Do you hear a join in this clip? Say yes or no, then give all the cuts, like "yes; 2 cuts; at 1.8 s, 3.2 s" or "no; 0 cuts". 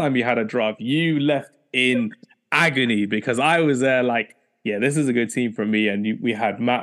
no; 0 cuts